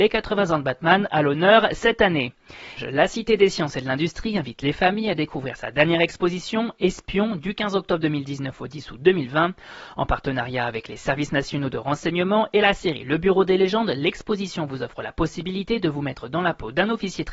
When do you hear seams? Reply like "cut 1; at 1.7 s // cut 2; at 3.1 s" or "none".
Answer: cut 1; at 2.8 s